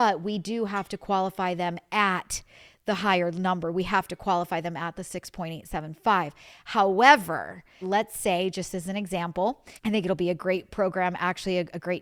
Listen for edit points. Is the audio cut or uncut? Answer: cut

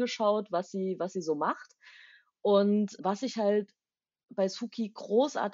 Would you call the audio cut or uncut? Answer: cut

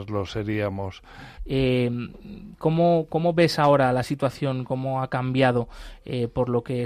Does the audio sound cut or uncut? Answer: cut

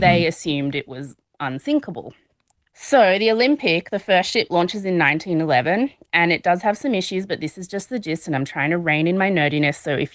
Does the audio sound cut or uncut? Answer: uncut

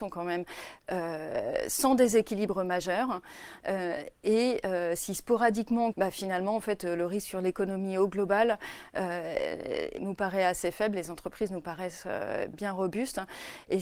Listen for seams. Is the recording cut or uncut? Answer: cut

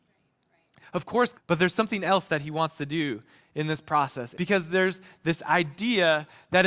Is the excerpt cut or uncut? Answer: cut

